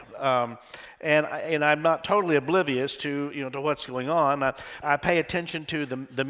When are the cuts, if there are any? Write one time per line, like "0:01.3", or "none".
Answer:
0:04.8

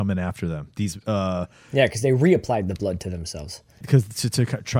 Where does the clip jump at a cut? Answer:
0:03.8

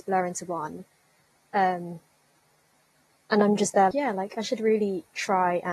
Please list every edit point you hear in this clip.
0:03.9

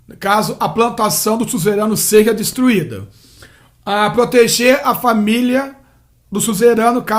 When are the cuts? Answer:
none

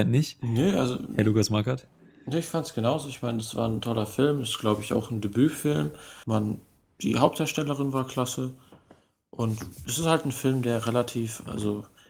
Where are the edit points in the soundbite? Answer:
0:06.2

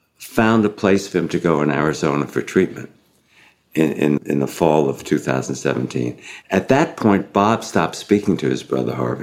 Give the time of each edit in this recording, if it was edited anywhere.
0:04.2
0:06.4

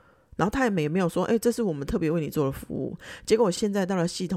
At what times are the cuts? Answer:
none

